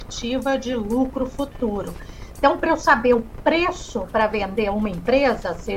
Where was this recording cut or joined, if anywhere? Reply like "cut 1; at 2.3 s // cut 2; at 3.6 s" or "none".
none